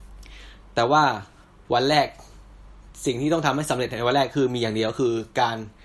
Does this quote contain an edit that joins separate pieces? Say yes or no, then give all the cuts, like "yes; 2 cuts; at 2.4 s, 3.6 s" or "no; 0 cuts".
no; 0 cuts